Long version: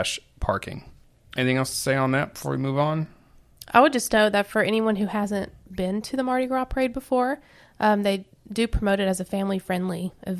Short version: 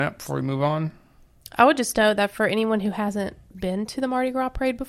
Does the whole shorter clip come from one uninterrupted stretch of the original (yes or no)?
yes